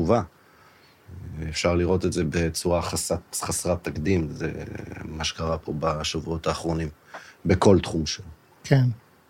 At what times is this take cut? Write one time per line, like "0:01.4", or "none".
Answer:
none